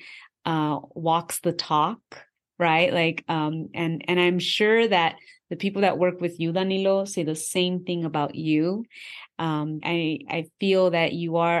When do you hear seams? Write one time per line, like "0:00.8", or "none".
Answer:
0:09.8